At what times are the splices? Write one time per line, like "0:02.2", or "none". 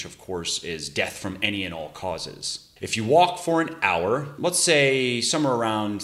0:02.8
0:04.4